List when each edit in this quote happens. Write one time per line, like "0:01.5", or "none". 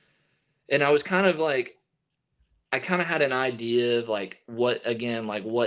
none

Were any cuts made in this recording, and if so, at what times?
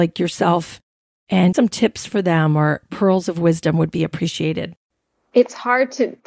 0:01.5

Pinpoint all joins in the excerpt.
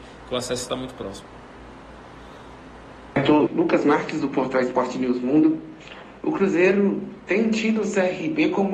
0:03.5

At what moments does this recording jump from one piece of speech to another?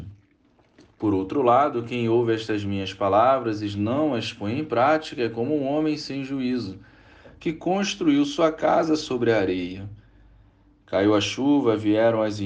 none

